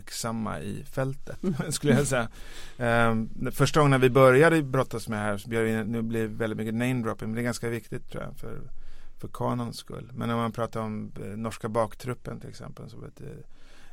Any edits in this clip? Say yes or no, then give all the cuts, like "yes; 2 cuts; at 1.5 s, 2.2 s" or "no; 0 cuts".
no; 0 cuts